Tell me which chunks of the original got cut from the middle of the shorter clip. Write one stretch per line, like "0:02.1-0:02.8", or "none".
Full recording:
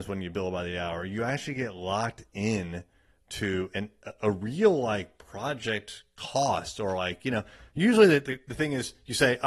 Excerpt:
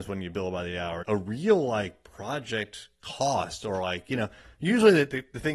0:01.0-0:04.2

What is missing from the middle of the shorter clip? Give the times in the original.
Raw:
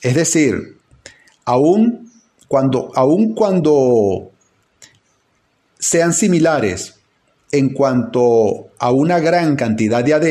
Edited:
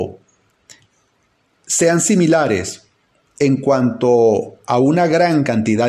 none

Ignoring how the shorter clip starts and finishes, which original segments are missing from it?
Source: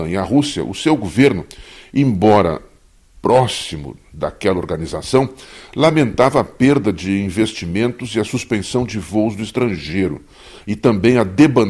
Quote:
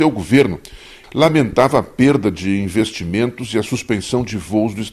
0:01.9-0:05.7

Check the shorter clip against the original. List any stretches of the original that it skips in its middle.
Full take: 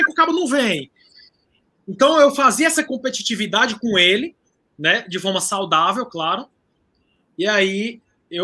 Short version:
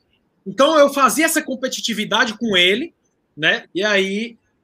0:05.0-0:07.3

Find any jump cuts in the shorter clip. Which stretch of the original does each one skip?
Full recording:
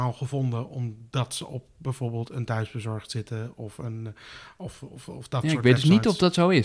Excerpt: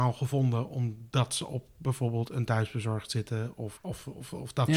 0:03.8-0:04.5

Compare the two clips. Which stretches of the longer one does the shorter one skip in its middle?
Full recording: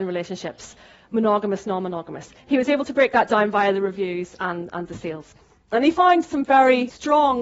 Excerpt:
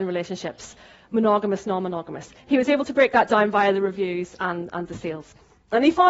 none

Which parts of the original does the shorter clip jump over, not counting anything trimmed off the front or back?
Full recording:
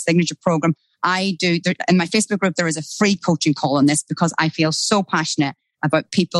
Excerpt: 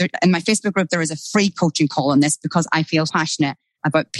0:04.7-0:05.0

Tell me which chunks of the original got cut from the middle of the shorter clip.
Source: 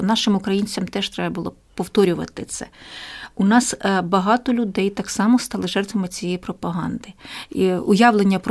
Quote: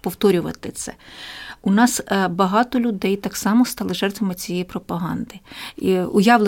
none

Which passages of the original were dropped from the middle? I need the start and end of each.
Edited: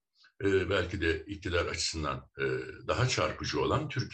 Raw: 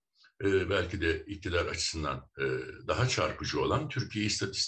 none

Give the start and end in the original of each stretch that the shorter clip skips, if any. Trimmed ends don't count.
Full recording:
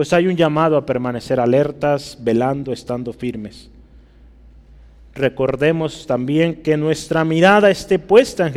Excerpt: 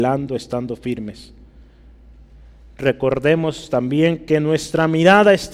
none

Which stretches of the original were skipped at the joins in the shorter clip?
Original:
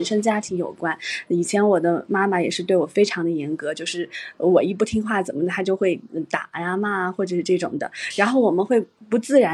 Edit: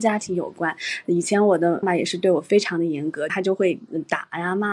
0:02.0-0:02.3
0:03.7-0:05.5

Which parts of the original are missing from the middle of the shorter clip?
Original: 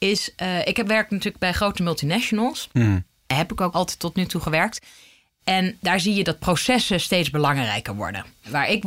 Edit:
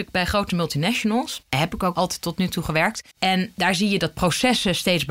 0:02.7-0:03.2
0:04.9-0:05.4

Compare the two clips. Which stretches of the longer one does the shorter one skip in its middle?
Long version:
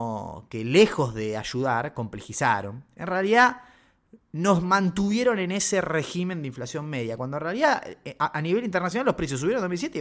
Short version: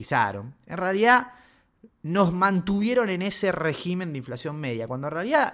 none

